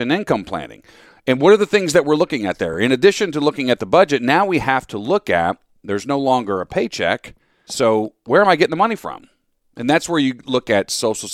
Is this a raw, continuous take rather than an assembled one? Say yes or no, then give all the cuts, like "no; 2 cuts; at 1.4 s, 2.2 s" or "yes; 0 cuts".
yes; 0 cuts